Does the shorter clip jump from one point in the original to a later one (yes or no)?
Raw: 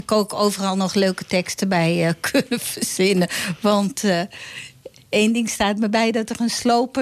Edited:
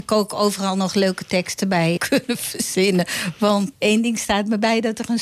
yes